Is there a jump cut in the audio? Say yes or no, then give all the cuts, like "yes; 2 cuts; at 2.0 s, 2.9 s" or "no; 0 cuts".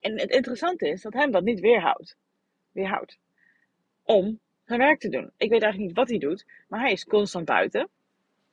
no; 0 cuts